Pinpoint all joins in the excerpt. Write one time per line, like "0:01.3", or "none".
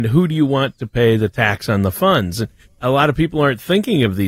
none

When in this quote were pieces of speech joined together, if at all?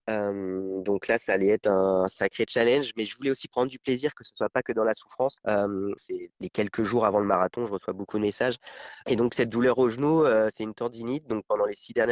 0:06.0

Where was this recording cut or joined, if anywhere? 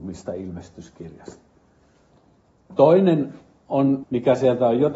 0:02.7
0:04.0

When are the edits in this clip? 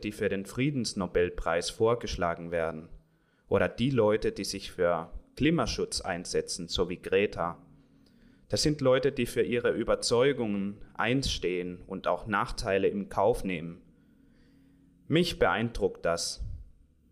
none

